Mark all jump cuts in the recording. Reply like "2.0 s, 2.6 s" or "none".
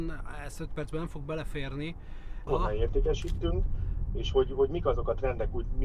2.5 s